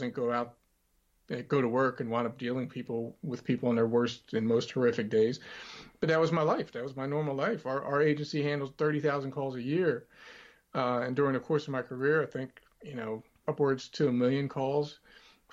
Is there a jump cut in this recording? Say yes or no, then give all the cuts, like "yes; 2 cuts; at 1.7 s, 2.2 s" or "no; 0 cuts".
yes; 1 cut; at 13.4 s